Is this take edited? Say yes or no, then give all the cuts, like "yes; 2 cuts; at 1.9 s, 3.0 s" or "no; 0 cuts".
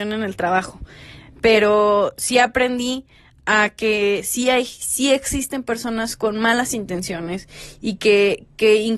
no; 0 cuts